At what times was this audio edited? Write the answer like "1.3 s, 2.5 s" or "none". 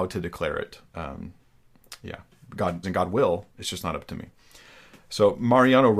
2.8 s